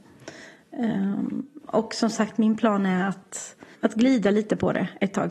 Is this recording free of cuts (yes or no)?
no